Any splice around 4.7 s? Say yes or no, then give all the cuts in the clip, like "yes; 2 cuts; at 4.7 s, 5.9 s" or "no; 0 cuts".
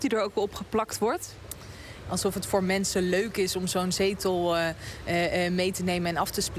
no; 1 cut; at 2.0 s